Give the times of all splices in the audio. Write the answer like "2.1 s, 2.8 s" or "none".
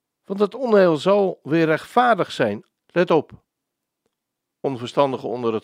2.7 s